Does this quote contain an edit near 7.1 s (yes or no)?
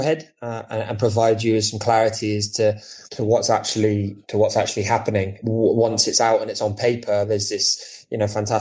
no